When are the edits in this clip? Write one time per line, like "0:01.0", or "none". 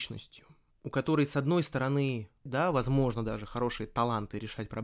0:02.5